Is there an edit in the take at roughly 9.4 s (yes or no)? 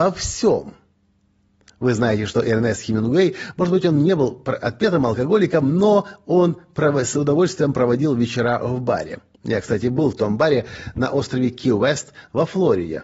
no